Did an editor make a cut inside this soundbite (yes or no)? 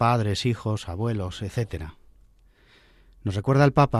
no